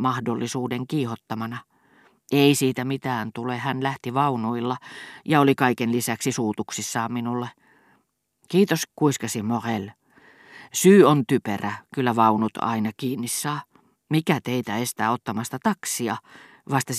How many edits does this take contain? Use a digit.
1